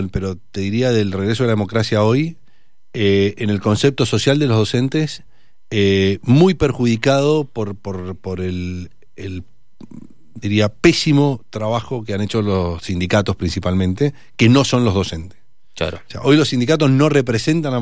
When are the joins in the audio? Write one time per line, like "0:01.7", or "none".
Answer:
none